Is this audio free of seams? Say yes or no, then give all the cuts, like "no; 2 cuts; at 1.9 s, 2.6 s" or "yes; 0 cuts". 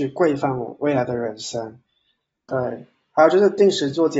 no; 1 cut; at 2.5 s